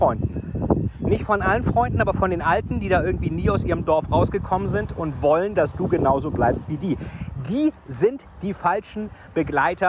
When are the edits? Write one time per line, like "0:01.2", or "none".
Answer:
none